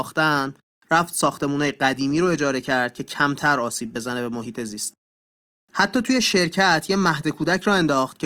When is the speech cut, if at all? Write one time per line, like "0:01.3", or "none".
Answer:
none